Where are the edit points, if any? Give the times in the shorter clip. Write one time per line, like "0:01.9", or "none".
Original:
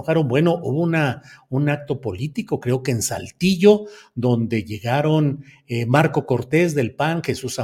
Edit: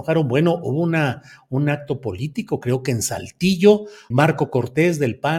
0:04.1